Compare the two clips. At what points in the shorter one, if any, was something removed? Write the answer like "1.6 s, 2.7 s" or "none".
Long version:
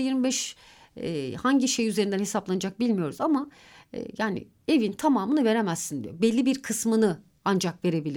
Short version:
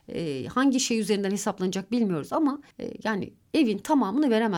2.7 s